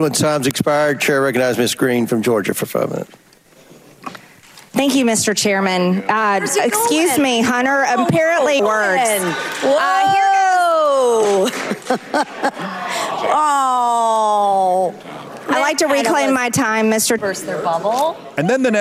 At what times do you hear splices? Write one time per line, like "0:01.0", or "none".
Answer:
0:08.6
0:17.2